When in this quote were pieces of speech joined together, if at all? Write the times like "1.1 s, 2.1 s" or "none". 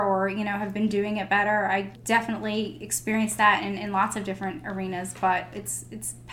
none